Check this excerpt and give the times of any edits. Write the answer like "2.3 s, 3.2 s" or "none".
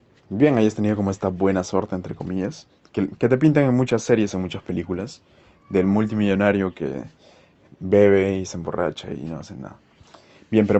none